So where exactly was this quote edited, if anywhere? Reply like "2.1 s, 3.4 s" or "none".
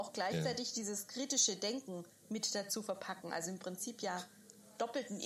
none